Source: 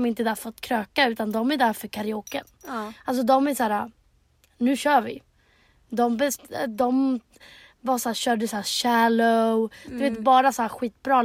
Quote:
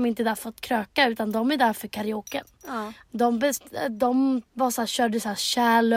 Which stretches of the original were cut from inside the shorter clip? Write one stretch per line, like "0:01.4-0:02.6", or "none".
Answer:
0:03.0-0:05.8
0:07.3-0:07.7